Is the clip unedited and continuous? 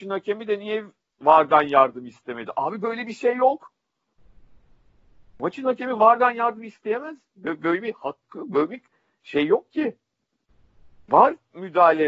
yes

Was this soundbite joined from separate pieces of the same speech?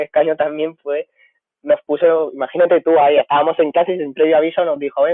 no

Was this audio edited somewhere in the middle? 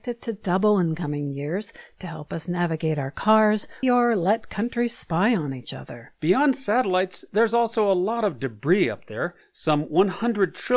yes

